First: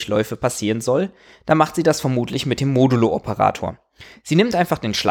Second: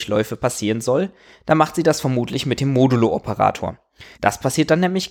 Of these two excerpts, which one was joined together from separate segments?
second; 1 cut; at 4.1 s

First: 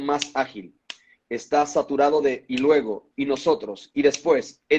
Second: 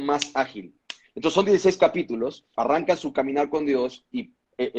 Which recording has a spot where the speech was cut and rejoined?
second; 2 cuts; at 1.0 s, 2.5 s

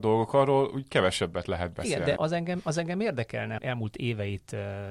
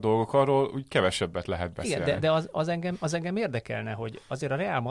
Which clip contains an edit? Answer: first; 2 cuts; at 2.2 s, 3.6 s

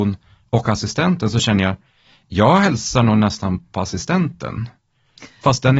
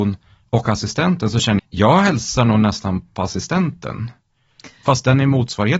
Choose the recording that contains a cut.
second; 1 cut; at 1.6 s

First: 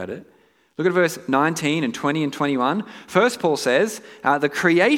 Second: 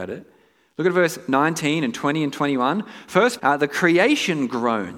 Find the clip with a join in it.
second; 1 cut; at 3.4 s

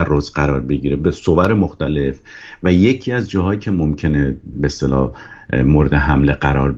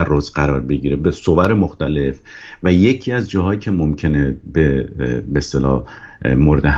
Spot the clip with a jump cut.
first; 1 cut; at 4.5 s

